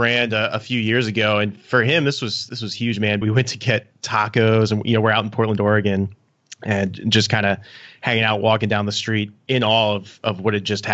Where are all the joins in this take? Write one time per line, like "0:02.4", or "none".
0:03.2